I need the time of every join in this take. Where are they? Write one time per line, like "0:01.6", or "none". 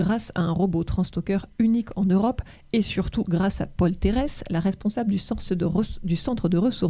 none